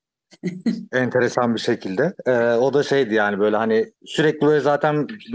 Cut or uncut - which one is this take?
cut